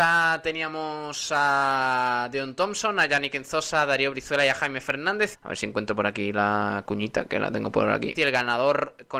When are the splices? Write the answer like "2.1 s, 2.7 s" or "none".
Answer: 5.3 s, 8.1 s

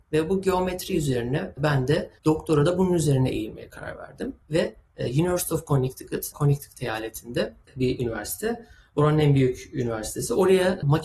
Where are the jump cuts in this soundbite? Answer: 6.3 s

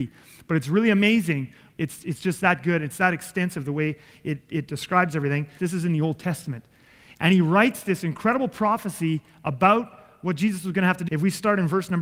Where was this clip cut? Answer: 1.7 s, 5.6 s, 11.1 s

